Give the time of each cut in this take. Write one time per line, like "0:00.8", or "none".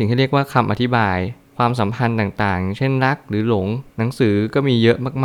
0:03.9